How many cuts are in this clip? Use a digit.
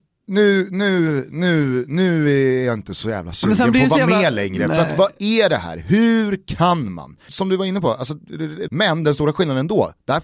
2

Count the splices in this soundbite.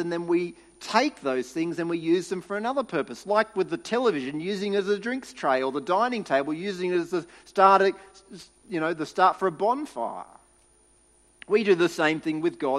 0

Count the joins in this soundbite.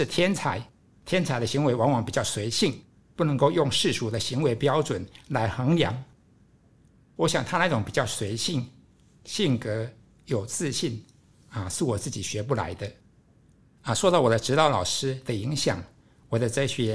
1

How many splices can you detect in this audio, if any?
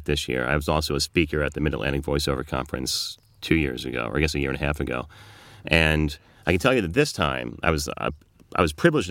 0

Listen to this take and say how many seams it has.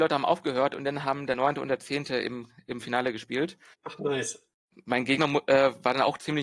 0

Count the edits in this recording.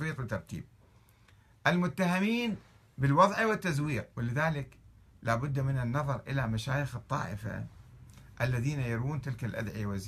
1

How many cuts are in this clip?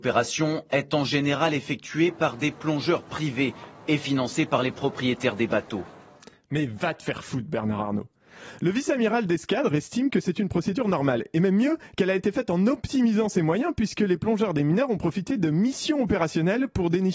0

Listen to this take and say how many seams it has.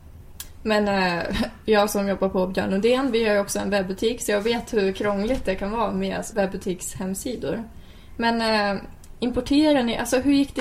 1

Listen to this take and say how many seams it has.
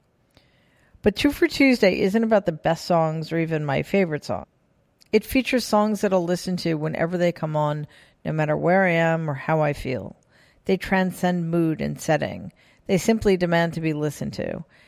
0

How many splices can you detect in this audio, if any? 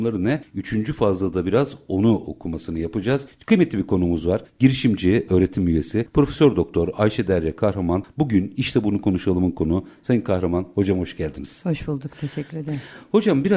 0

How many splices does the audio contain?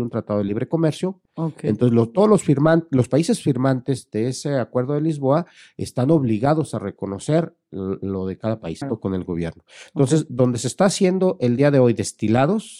2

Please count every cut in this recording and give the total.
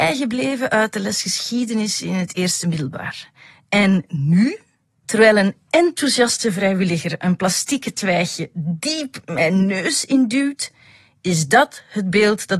1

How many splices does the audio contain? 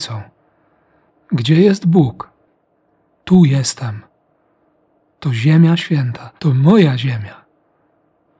2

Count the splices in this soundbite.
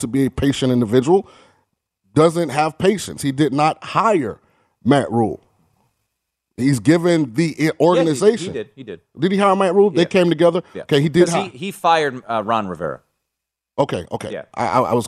0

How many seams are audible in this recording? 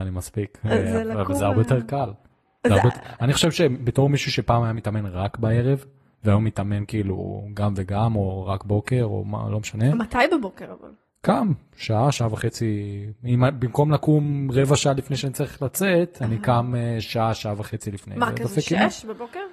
0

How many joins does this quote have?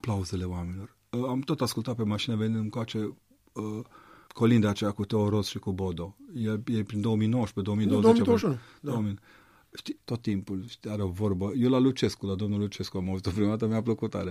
2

